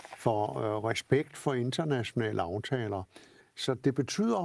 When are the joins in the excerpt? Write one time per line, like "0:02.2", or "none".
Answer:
0:03.4